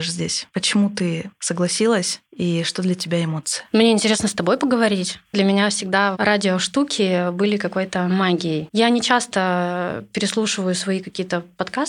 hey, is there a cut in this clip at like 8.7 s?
yes; 2 cuts; at 5.3 s, 8.7 s

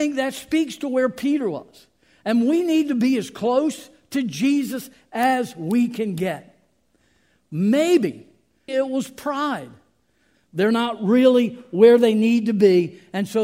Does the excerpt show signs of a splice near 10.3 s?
yes; 2 cuts; at 8.7 s, 10.3 s

